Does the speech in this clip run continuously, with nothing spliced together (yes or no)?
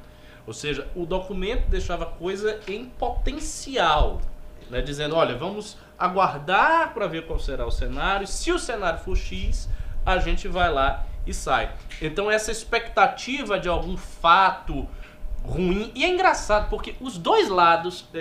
yes